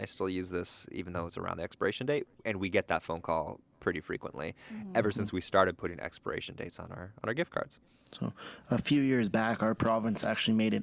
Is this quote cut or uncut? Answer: uncut